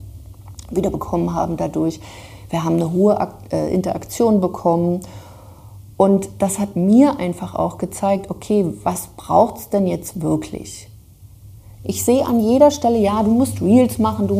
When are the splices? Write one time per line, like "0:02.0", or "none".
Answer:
0:11.8